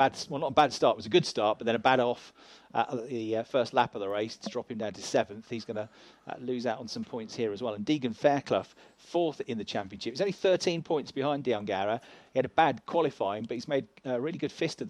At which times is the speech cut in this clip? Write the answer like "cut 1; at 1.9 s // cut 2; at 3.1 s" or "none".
none